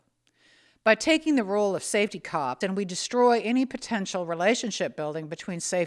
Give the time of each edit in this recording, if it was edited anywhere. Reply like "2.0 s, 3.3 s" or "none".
2.6 s